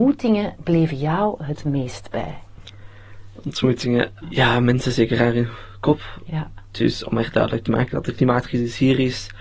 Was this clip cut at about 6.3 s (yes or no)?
yes